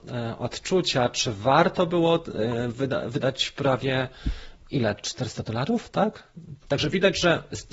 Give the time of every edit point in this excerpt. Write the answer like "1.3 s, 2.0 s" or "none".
6.6 s